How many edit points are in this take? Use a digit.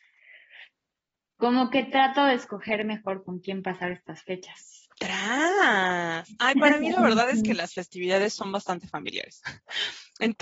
1